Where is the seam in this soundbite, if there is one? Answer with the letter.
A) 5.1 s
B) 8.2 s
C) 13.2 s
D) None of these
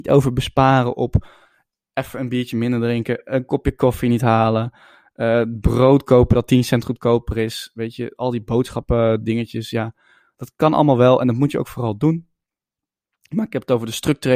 D